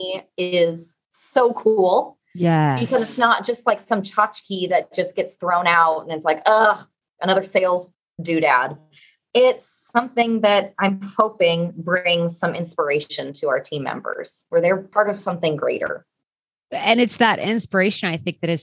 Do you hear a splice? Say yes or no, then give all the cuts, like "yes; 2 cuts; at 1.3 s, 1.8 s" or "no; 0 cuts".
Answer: no; 0 cuts